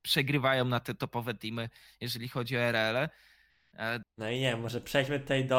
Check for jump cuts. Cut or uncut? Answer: cut